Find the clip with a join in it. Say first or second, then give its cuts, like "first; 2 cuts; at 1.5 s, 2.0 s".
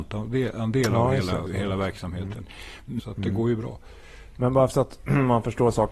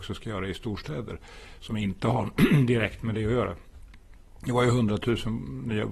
first; 3 cuts; at 1.5 s, 3.0 s, 4.3 s